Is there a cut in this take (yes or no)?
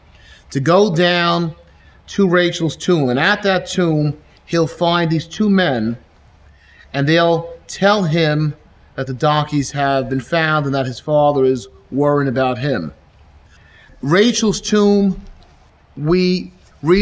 no